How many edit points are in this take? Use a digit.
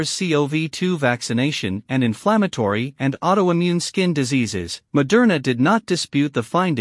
1